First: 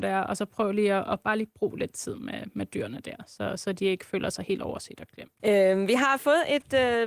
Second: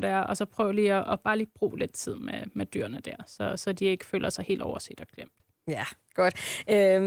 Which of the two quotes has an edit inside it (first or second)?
first